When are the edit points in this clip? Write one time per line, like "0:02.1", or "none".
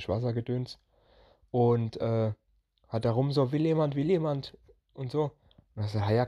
none

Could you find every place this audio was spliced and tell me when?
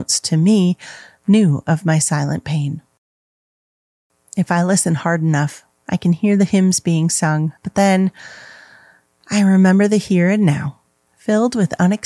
0:07.6
0:11.1

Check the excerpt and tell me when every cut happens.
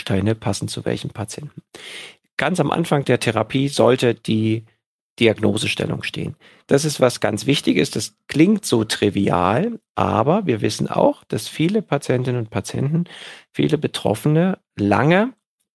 none

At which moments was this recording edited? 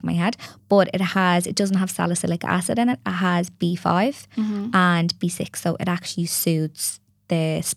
none

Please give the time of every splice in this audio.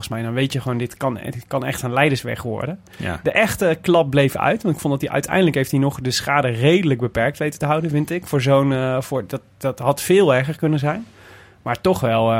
none

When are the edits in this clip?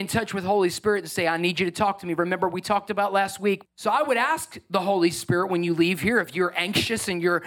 0:03.6

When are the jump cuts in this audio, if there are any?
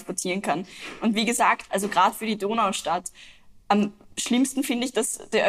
none

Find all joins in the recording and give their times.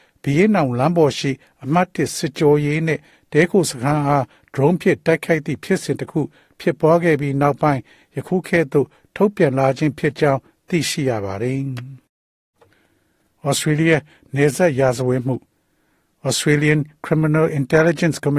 none

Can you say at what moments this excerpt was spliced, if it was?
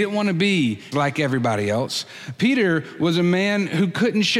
0:00.9

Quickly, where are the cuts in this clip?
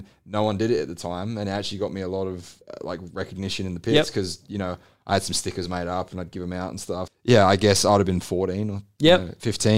0:02.6
0:07.1

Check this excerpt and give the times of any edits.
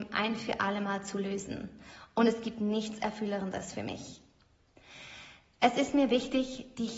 none

